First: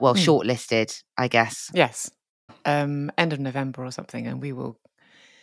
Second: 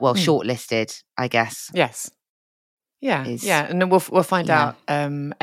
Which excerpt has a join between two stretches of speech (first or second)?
first